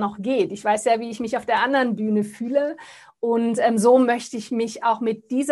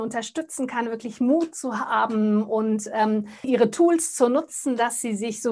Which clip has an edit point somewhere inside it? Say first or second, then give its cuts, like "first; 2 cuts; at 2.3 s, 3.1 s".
second; 1 cut; at 3.4 s